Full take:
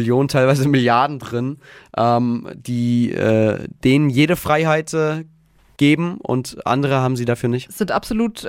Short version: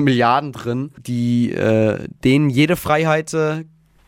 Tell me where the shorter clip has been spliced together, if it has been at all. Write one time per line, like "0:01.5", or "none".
0:01.0